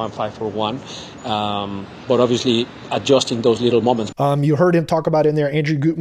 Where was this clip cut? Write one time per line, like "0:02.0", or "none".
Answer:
0:01.2
0:04.1